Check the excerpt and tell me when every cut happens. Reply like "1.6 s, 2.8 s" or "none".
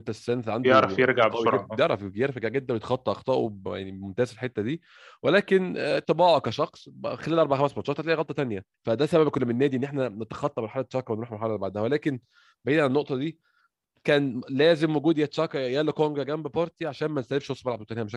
8.7 s